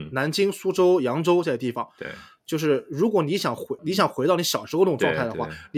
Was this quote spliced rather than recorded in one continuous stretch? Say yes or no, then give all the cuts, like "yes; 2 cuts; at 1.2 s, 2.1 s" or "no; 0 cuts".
yes; 1 cut; at 3.8 s